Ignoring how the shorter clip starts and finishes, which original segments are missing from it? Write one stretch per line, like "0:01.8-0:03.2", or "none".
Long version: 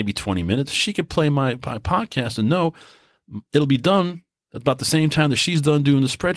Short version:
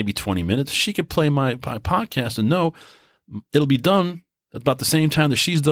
none